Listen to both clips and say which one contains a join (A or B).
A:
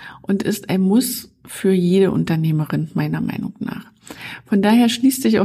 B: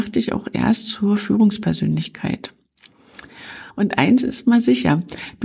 B